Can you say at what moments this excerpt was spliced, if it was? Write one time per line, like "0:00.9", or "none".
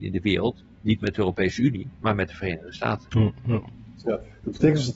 none